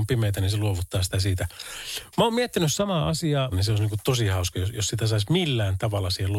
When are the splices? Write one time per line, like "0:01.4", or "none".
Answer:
0:03.5